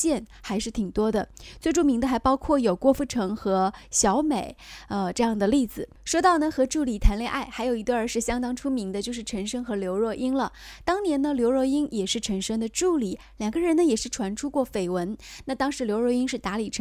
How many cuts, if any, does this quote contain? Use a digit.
0